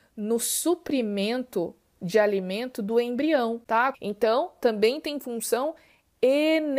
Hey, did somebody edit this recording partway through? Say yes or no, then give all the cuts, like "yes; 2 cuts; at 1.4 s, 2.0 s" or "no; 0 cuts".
yes; 1 cut; at 3.9 s